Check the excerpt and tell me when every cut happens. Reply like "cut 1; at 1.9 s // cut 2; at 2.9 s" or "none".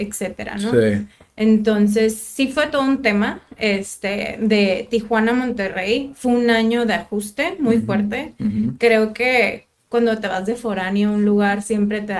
none